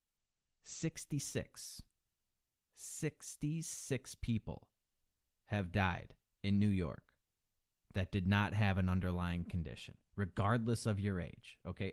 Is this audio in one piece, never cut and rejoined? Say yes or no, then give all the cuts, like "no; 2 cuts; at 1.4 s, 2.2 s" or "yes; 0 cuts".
yes; 0 cuts